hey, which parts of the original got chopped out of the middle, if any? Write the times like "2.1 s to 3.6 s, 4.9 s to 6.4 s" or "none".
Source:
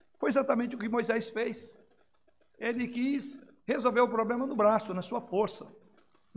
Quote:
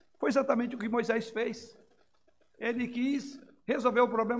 none